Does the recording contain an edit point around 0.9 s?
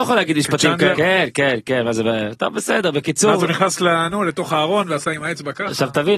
yes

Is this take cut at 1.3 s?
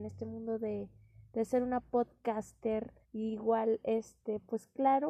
no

